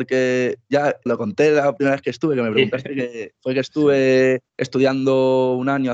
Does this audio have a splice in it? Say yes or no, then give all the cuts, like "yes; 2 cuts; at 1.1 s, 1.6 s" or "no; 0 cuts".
yes; 2 cuts; at 1.1 s, 4.5 s